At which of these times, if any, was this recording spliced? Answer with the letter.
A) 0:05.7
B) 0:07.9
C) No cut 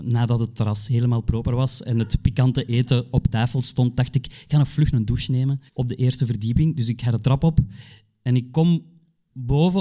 A